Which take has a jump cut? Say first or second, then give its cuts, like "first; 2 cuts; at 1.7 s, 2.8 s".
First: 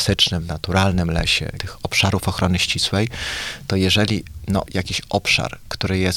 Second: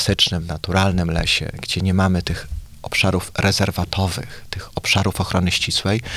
first; 2 cuts; at 1.6 s, 4.7 s